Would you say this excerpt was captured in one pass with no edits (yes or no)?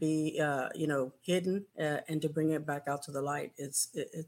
no